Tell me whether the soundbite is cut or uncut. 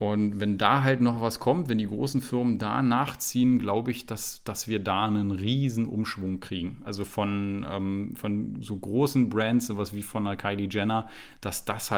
uncut